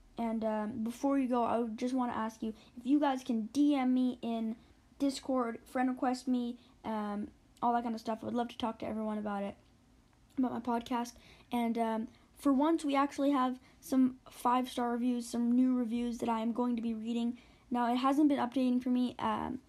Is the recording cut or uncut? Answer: uncut